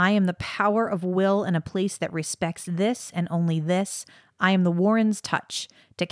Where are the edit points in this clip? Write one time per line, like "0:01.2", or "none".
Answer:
none

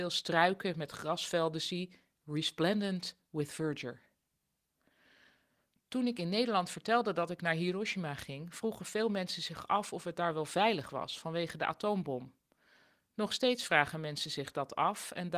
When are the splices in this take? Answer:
none

